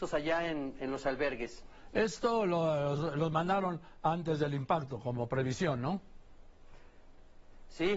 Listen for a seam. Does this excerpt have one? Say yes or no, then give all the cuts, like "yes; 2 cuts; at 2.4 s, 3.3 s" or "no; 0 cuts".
no; 0 cuts